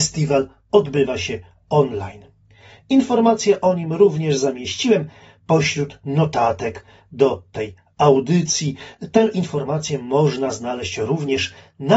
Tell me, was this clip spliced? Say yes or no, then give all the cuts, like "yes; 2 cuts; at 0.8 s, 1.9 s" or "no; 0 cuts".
no; 0 cuts